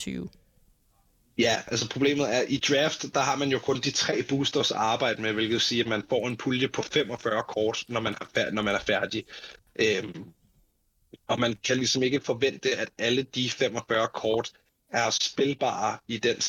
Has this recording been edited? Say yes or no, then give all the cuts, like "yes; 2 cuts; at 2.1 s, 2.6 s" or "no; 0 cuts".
no; 0 cuts